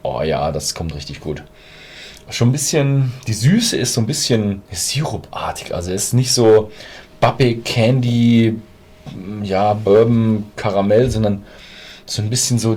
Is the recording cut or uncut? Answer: cut